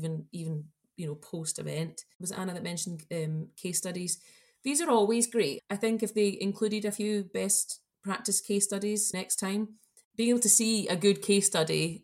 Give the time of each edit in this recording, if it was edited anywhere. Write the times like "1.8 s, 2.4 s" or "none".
5.6 s, 9.1 s